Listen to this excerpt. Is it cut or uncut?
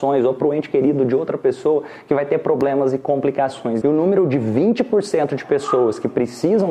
cut